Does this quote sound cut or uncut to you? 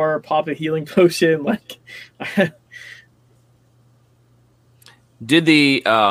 uncut